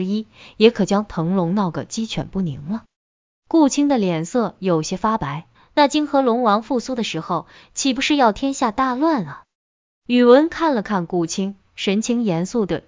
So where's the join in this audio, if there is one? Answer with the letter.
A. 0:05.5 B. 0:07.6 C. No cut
A